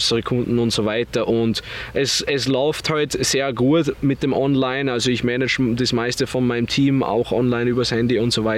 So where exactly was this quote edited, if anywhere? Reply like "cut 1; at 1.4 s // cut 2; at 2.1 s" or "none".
none